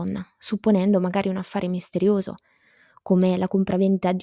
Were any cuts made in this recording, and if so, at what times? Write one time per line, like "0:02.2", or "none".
none